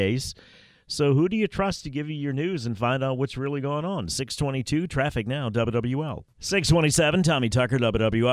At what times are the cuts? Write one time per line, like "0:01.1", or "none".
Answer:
0:06.3